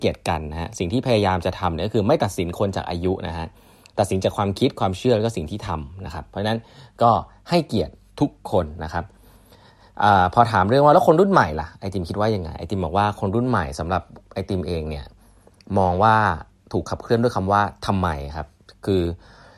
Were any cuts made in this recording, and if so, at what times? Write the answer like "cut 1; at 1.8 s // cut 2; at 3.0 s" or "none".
none